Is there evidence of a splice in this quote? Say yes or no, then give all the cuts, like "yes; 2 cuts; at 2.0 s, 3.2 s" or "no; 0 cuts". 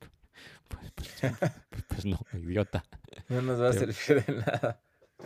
no; 0 cuts